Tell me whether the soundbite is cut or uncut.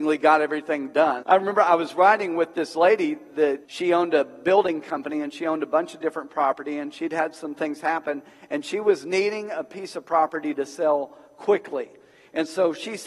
cut